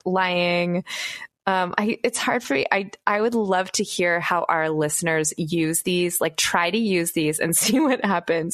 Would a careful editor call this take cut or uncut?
uncut